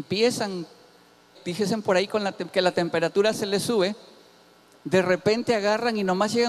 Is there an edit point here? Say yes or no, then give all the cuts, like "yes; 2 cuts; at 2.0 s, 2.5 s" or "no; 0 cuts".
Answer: yes; 1 cut; at 1.3 s